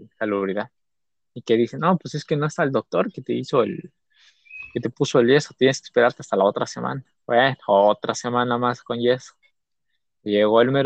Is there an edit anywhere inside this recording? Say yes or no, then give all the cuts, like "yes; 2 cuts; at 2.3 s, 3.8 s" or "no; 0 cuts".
no; 0 cuts